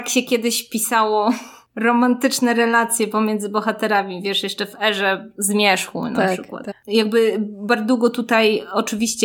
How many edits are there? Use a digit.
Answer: 1